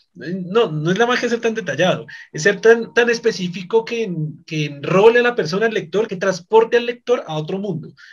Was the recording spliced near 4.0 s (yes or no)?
no